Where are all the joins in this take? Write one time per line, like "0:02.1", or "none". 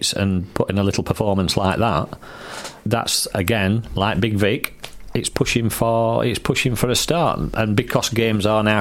0:02.8